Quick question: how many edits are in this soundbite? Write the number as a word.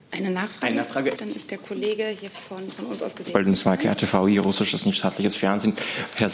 one